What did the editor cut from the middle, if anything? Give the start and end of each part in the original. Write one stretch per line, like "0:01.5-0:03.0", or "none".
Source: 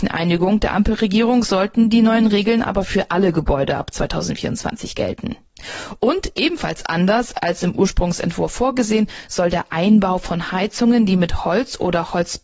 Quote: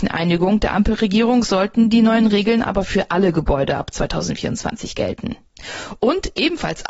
none